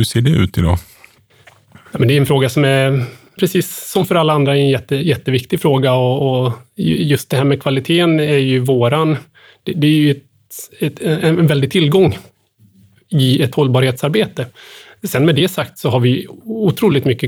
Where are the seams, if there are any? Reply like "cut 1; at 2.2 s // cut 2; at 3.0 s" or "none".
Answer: cut 1; at 3.4 s